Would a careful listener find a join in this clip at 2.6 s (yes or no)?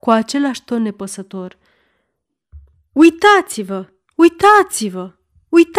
no